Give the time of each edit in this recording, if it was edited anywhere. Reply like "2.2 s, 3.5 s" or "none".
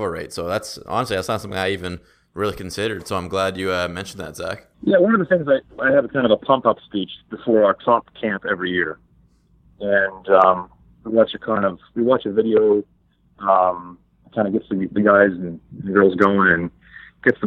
4.7 s